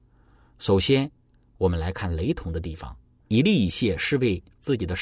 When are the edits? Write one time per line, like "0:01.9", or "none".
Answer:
0:03.3